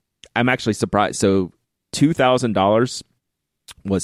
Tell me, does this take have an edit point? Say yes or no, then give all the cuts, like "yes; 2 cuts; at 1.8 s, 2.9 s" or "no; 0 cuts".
no; 0 cuts